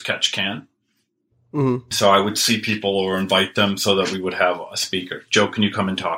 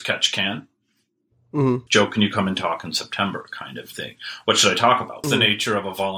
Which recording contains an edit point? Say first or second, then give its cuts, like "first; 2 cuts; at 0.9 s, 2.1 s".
second; 2 cuts; at 1.9 s, 5.2 s